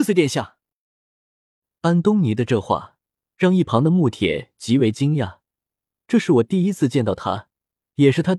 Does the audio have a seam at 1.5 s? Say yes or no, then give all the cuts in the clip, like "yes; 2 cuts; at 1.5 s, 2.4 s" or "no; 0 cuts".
no; 0 cuts